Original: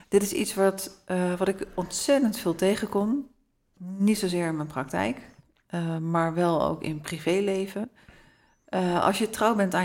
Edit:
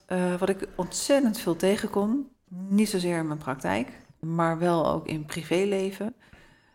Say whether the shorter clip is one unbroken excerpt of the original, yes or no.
no